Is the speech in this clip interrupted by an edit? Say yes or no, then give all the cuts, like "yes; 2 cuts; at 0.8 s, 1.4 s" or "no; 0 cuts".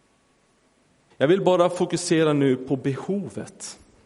yes; 1 cut; at 1.1 s